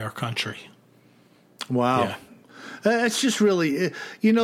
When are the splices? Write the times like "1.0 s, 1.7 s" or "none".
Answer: none